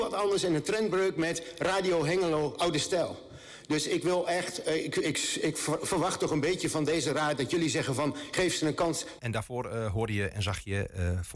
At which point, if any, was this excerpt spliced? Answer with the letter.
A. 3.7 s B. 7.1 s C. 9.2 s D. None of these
C